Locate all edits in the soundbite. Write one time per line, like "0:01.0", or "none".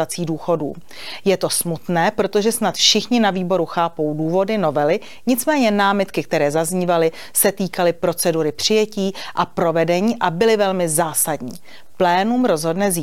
none